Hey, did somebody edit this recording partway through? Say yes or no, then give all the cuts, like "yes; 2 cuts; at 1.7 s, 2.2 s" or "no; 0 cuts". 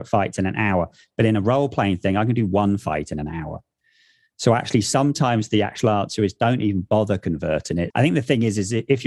yes; 1 cut; at 7.9 s